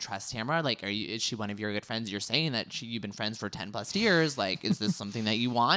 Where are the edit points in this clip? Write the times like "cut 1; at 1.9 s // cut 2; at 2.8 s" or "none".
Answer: none